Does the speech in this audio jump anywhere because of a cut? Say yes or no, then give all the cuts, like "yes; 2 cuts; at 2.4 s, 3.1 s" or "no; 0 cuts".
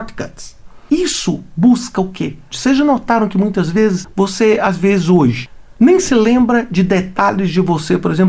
yes; 1 cut; at 2.5 s